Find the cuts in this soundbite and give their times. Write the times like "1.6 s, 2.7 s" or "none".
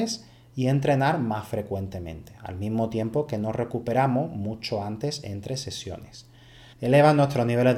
6.7 s

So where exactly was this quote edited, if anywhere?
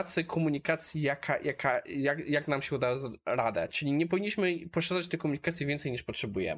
none

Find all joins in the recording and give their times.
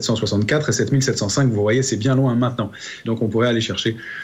3.0 s

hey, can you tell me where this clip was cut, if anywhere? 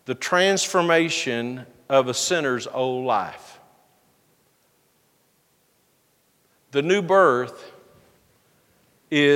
none

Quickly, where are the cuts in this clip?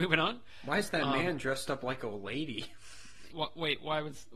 3.3 s

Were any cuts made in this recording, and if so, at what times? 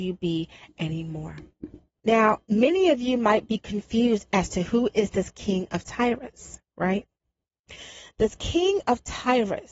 2.0 s

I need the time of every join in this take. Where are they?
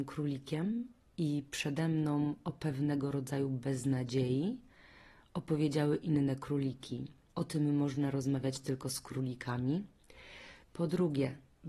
7.3 s, 10.6 s

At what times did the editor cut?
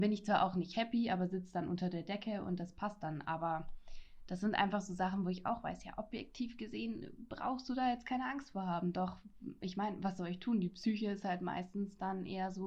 none

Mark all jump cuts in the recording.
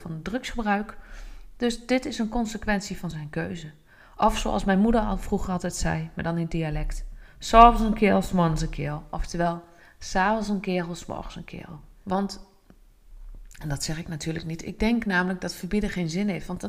12.0 s

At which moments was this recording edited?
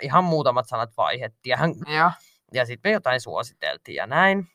1.8 s

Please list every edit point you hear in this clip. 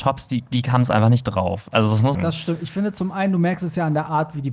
2.1 s

